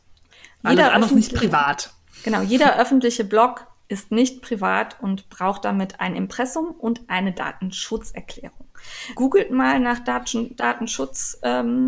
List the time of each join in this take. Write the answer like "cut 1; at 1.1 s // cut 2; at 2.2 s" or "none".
cut 1; at 9.2 s